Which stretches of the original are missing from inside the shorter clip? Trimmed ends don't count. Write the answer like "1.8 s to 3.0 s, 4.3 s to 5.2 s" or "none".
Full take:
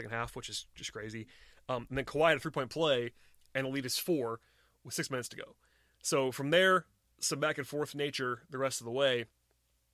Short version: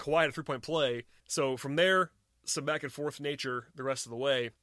3.3 s to 5.9 s